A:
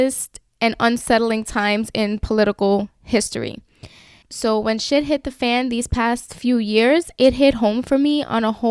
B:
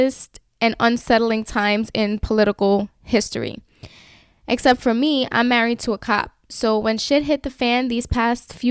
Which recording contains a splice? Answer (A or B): A